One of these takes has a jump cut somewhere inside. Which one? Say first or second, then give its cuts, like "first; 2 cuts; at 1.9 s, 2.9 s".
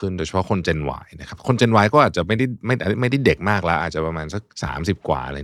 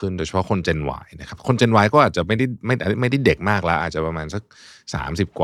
first; 1 cut; at 4.5 s